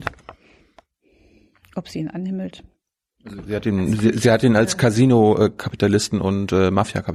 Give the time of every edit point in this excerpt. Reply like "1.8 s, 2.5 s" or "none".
none